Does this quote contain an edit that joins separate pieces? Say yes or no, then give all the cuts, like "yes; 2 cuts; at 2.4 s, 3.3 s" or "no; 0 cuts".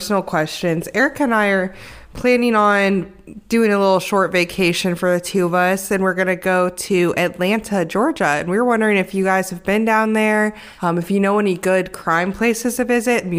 no; 0 cuts